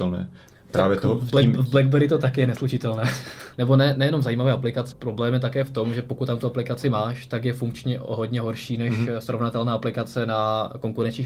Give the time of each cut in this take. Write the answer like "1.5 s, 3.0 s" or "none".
3.5 s, 4.9 s